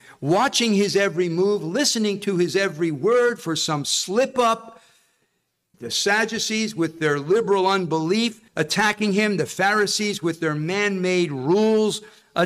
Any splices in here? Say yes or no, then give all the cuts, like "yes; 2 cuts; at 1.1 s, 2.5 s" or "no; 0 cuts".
yes; 2 cuts; at 5.7 s, 8.5 s